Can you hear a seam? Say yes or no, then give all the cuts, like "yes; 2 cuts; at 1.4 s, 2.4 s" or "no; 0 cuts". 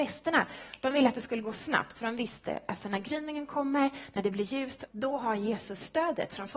yes; 1 cut; at 4.9 s